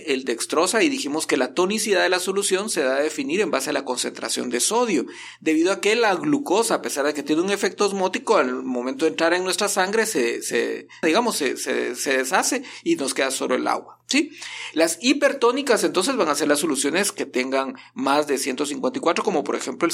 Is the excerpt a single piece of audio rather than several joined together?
no; 1 cut; at 11.0 s

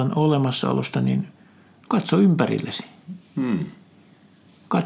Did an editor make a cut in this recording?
no; 0 cuts

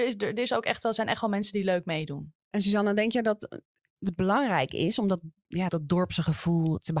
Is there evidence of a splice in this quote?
yes; 2 cuts; at 2.4 s, 5.7 s

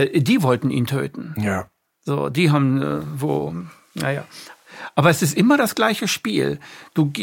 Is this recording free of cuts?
yes; 0 cuts

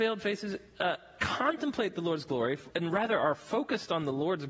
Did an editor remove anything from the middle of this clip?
yes; 1 cut; at 2.7 s

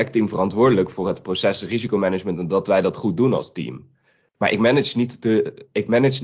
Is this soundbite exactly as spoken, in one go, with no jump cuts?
yes; 0 cuts

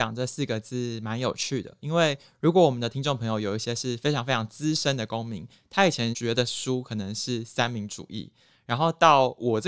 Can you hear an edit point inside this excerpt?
no; 0 cuts

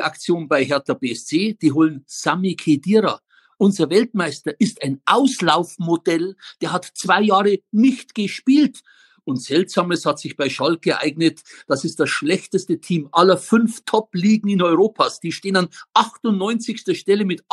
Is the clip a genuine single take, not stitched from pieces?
yes; 0 cuts

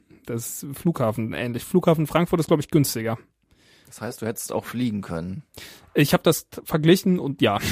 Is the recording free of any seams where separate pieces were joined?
yes; 0 cuts

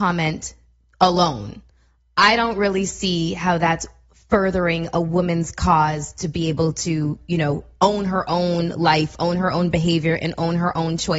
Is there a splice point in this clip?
no; 0 cuts

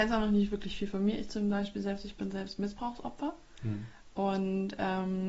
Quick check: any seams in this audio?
no; 0 cuts

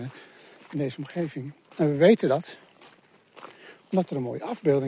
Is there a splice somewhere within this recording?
no; 0 cuts

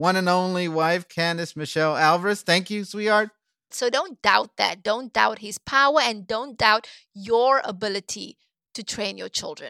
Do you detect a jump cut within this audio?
yes; 1 cut; at 3.7 s

